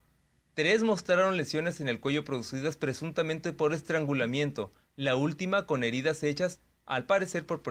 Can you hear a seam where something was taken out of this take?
no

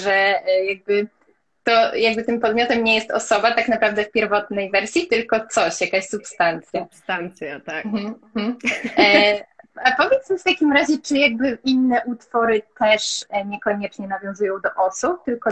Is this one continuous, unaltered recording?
yes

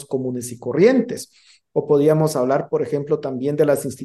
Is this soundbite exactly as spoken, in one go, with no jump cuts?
yes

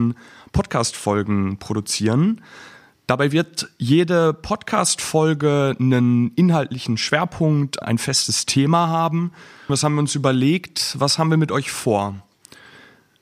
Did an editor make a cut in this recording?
yes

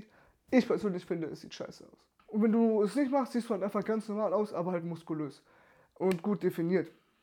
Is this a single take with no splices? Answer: no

